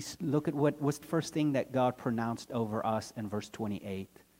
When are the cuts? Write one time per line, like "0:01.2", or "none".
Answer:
0:01.0